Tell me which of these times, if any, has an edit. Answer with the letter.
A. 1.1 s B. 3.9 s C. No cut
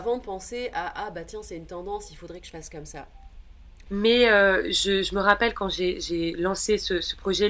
B